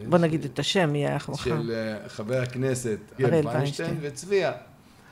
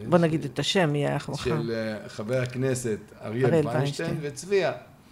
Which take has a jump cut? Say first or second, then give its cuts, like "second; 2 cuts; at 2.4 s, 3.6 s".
first; 1 cut; at 3.2 s